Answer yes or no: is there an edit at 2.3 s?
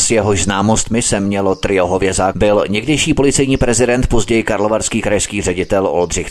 yes